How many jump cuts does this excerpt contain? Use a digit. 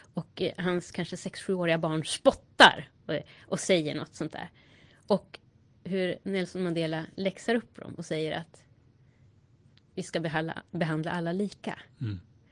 0